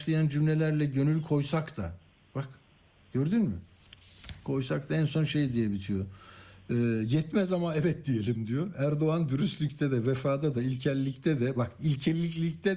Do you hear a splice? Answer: no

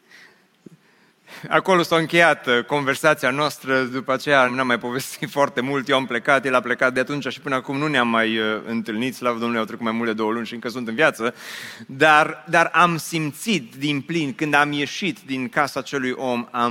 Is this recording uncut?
no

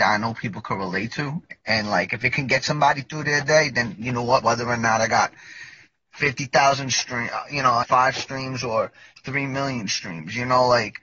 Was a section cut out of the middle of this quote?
yes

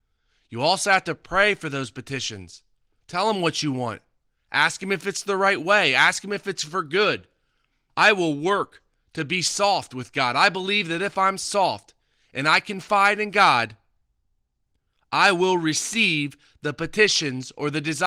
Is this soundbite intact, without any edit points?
no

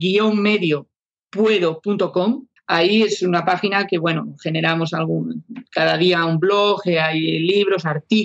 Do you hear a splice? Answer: yes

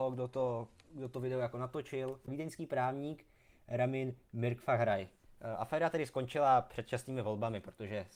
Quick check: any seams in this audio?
no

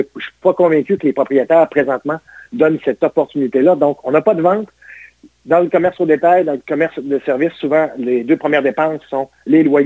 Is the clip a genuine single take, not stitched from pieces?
yes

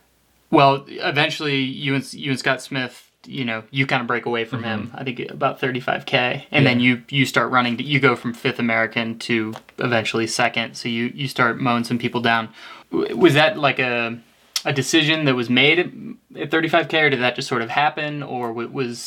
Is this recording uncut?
no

